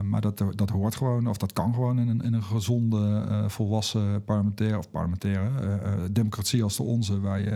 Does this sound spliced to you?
no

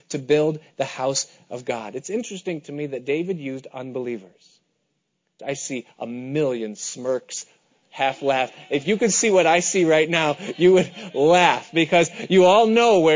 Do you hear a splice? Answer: yes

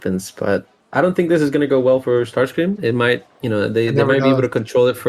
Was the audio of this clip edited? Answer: no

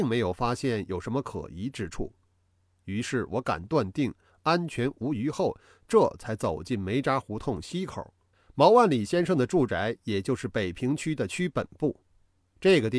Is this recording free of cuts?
no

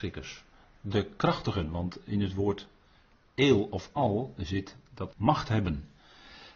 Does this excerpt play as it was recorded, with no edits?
no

